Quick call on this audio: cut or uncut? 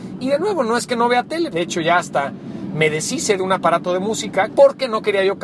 cut